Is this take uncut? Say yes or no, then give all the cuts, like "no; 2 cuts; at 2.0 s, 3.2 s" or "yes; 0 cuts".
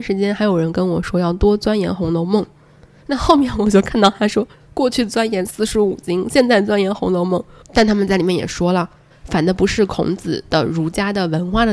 no; 2 cuts; at 7.6 s, 9.1 s